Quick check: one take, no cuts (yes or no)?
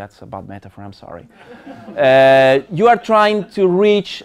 yes